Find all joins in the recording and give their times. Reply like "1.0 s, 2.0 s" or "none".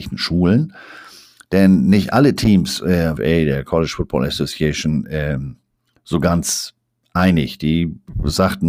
3.2 s